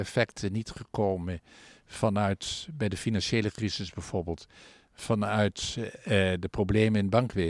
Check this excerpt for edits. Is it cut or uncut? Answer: uncut